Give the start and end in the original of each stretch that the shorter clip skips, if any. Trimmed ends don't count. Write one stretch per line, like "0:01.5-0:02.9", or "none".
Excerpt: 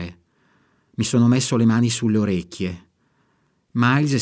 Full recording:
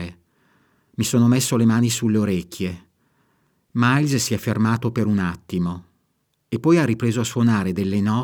none